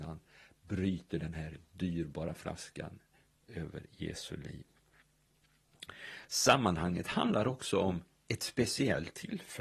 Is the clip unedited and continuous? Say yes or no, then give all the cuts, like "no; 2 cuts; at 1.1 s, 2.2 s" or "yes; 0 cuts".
yes; 0 cuts